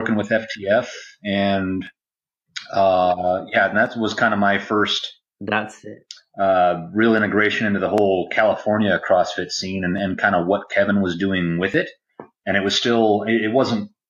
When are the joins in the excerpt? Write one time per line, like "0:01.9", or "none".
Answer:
none